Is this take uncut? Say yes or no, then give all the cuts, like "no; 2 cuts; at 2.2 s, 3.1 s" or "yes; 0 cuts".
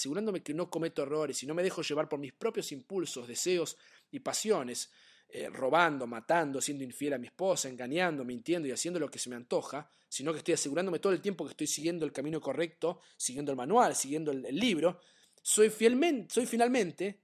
yes; 0 cuts